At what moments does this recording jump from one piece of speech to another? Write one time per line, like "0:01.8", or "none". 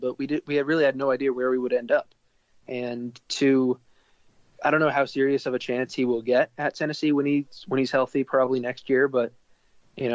none